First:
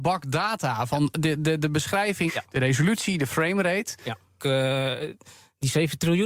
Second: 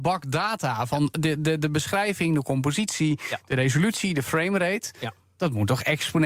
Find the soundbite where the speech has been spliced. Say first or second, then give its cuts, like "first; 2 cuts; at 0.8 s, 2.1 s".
first; 2 cuts; at 2.3 s, 4.4 s